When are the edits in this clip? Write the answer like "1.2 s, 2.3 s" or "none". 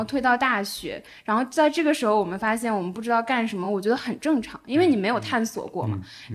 none